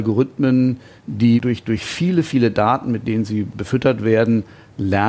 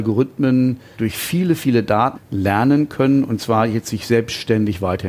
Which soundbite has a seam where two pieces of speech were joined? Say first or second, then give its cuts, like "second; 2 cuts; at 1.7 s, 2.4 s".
second; 2 cuts; at 0.9 s, 2.1 s